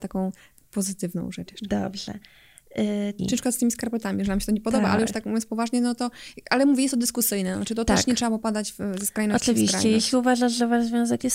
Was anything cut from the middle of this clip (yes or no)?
yes